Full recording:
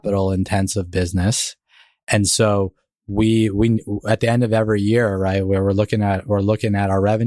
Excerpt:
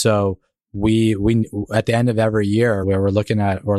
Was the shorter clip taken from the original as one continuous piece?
no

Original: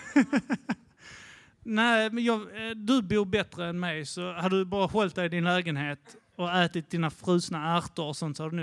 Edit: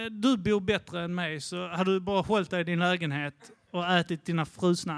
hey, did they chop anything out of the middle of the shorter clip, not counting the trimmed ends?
no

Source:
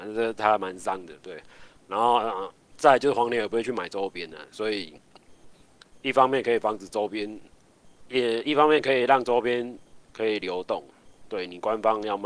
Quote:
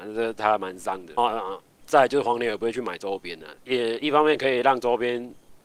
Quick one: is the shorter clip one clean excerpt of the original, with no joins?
no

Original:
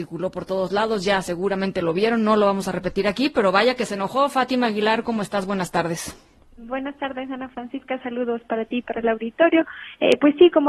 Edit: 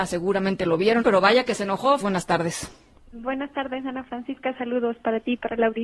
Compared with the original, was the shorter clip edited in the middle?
yes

